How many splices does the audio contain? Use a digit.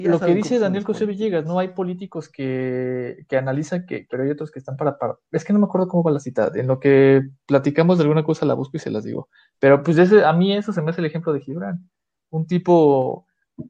1